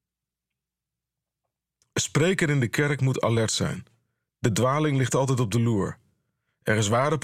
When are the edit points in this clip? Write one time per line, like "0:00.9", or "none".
none

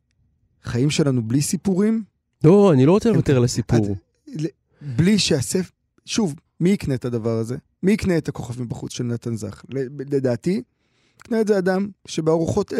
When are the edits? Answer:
0:06.5

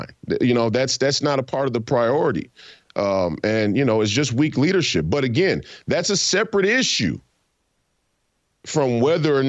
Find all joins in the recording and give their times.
none

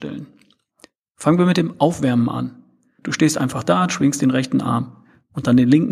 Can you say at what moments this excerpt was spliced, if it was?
0:03.0

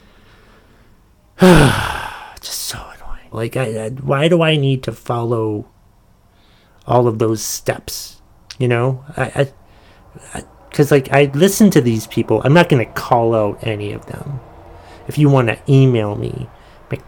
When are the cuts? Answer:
0:03.3

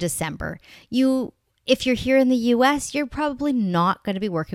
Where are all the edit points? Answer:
none

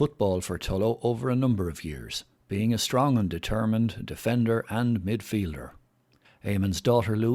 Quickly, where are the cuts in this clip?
0:06.2

